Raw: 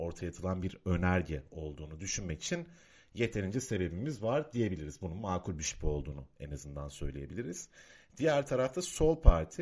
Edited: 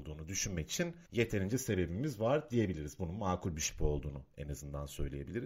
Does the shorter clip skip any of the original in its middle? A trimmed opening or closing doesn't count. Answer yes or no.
yes